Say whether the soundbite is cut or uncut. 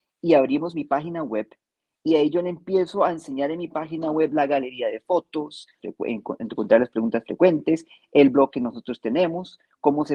cut